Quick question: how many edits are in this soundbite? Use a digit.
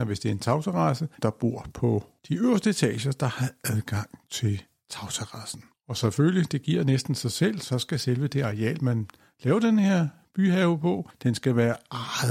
1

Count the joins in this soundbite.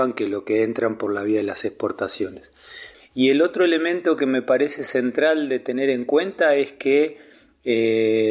1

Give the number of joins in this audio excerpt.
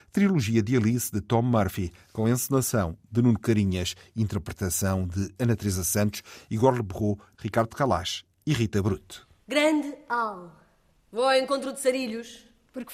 1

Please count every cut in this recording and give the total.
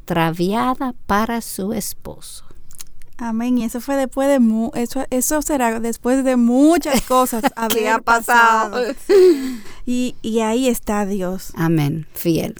0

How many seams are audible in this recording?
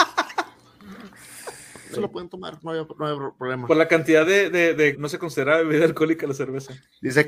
2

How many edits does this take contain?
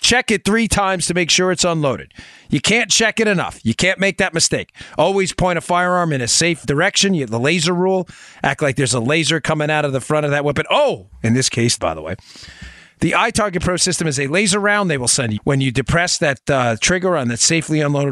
3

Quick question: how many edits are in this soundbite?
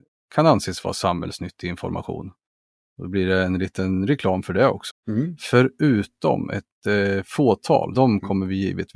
2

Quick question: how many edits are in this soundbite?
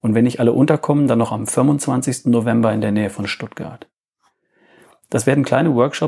0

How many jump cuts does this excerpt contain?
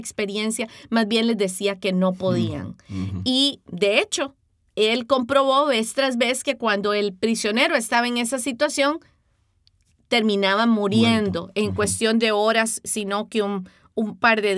0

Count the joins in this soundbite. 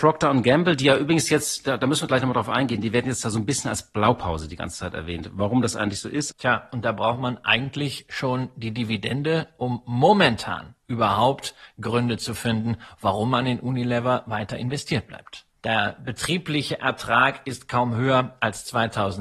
2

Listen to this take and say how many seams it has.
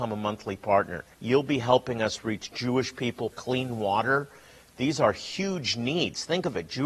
2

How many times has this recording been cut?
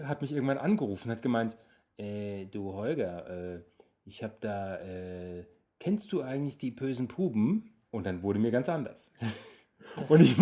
0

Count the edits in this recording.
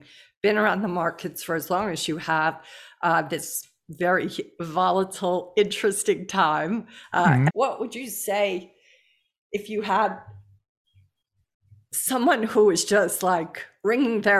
1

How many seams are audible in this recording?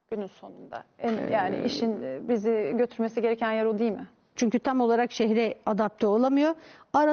1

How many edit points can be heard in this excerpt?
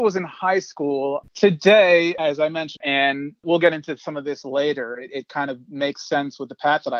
2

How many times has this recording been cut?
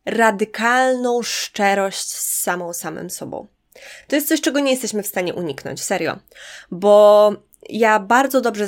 0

